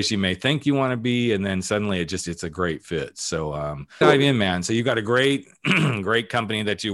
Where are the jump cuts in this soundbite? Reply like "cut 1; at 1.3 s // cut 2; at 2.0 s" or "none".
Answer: cut 1; at 4.0 s